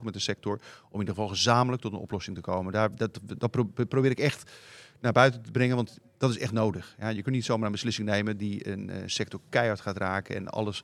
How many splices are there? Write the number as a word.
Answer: zero